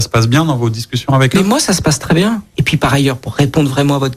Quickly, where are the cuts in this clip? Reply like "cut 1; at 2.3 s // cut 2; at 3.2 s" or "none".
cut 1; at 2.5 s